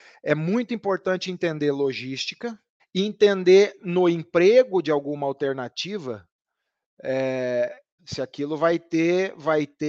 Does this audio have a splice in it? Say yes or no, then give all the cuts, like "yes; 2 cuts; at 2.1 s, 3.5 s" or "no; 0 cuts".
yes; 2 cuts; at 2.8 s, 8.0 s